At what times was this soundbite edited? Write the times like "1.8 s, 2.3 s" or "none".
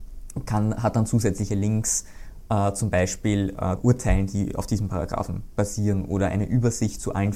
3.8 s